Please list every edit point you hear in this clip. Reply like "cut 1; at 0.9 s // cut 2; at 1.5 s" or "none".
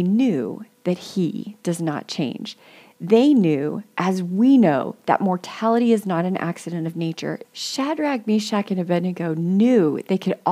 cut 1; at 7.4 s